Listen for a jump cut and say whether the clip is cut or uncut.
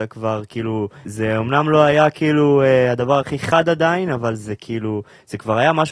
cut